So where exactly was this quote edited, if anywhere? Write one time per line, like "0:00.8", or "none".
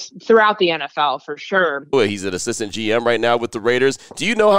0:01.9